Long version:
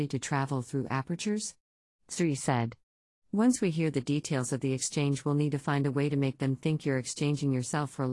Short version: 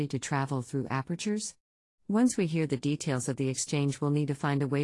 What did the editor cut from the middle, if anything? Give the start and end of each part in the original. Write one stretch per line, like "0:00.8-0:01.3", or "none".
0:02.0-0:03.2